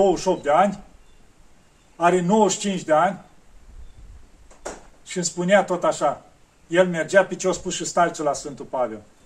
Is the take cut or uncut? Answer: uncut